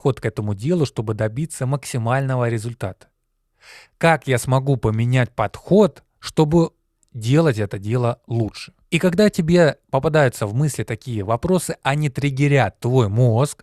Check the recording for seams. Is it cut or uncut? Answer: cut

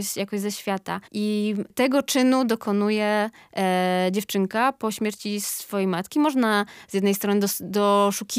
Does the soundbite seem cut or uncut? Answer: cut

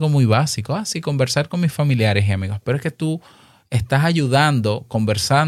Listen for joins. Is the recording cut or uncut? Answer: uncut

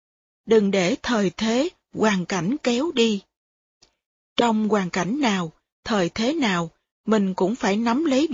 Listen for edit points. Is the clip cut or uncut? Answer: uncut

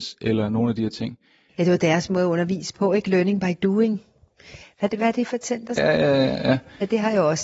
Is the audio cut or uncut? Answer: cut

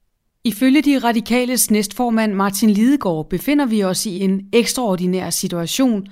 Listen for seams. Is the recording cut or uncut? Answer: uncut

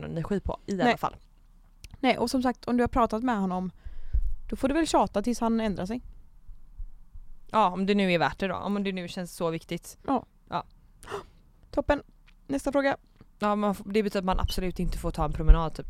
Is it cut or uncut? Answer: cut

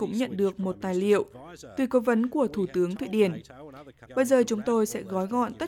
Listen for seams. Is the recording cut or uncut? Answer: cut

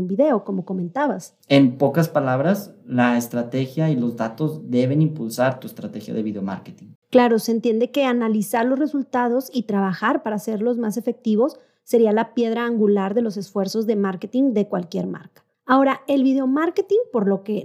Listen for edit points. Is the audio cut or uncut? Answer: cut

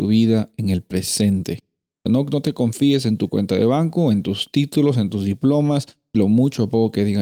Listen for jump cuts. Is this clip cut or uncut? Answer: cut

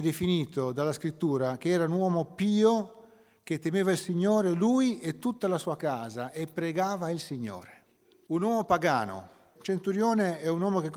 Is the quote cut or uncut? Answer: cut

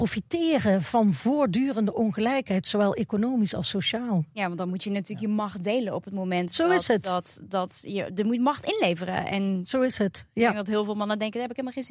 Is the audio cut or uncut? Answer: uncut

